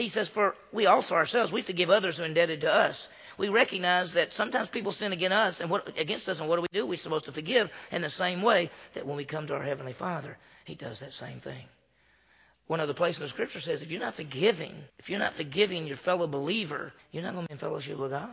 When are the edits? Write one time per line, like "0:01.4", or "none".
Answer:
0:14.9
0:17.0